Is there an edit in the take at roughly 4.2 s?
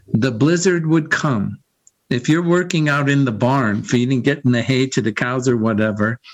no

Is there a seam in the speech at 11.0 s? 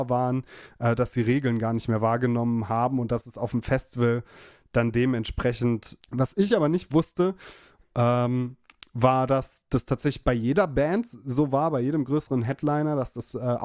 no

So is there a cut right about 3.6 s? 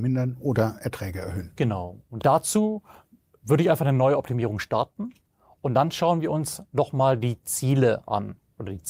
no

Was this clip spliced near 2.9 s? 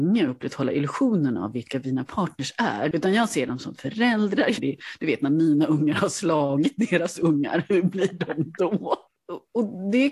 yes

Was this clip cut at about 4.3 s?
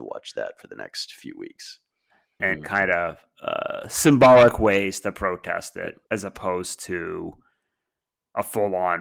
no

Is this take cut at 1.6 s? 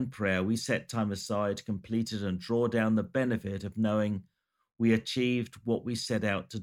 no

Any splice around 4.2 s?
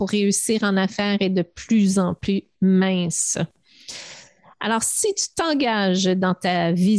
no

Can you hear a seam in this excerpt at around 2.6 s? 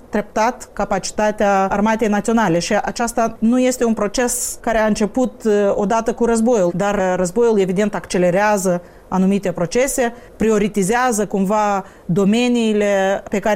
no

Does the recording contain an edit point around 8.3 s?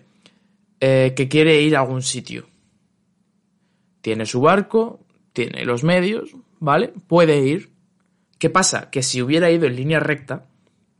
yes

